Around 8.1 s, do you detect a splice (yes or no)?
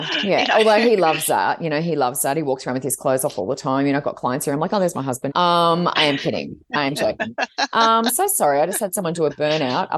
no